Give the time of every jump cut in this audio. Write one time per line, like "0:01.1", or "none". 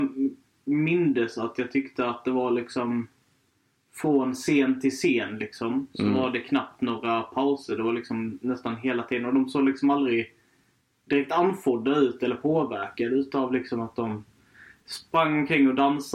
none

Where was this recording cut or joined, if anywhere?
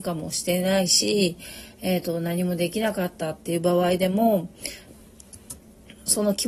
0:04.9

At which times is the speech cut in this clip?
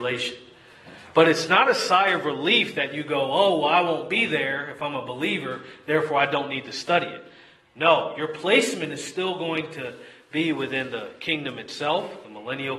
none

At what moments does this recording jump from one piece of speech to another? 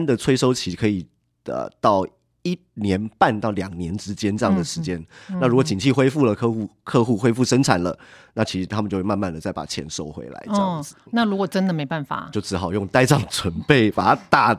0:11.1
0:12.3

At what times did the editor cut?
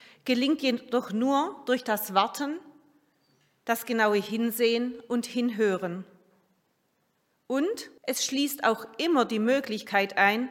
0:08.0

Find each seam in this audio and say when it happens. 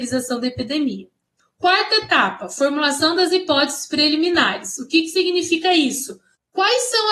none

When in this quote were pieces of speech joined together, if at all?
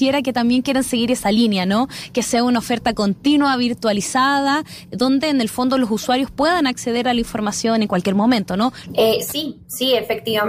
0:08.9

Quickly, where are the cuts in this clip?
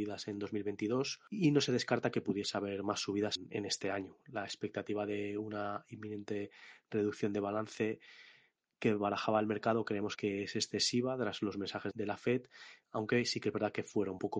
none

